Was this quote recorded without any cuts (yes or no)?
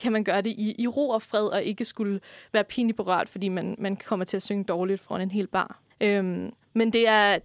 no